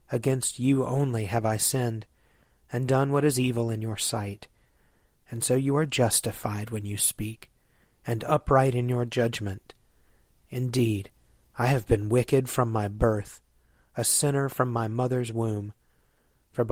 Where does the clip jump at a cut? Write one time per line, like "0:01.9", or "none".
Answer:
none